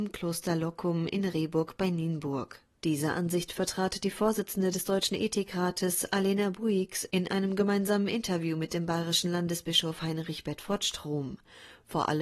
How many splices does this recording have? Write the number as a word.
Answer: one